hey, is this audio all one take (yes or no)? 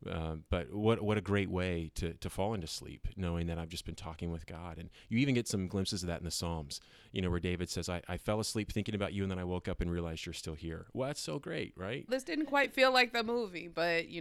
no